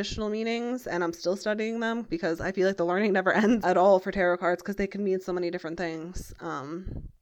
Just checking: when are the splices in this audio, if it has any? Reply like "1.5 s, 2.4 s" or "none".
3.6 s